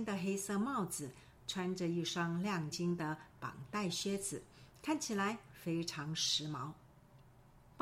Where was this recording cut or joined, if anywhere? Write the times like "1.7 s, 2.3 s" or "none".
2.7 s